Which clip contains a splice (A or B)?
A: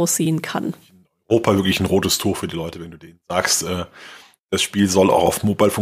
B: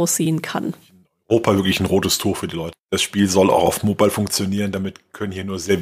B